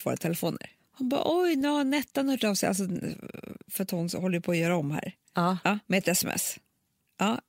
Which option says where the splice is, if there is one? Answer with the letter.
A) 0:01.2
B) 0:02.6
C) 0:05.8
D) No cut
C